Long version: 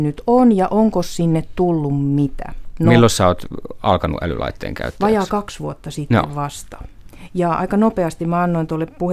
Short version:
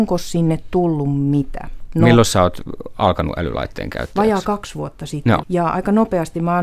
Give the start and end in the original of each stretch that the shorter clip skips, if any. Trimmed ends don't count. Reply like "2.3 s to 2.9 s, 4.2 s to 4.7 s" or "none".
6.3 s to 7.3 s